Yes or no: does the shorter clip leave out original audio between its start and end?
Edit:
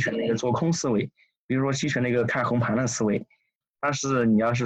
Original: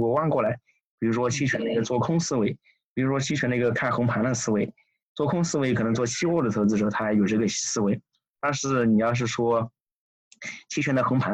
yes